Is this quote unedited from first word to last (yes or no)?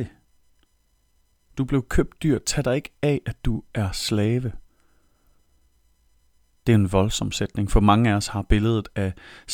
yes